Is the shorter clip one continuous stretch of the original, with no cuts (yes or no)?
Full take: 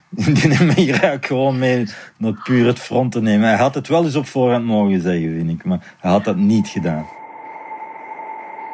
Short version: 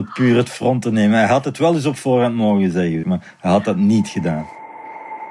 no